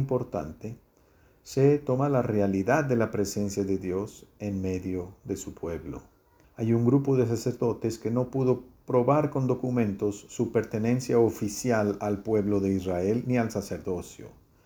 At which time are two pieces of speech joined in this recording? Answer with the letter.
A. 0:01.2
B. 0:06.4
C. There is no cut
B